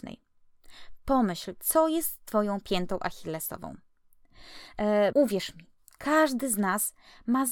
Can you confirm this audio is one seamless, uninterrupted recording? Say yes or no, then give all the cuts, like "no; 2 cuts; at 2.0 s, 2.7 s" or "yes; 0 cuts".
no; 1 cut; at 5.1 s